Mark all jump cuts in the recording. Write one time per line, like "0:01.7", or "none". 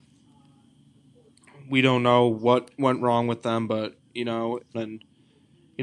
0:04.7